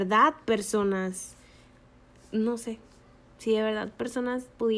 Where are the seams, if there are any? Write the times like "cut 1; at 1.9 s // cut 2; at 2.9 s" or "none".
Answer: none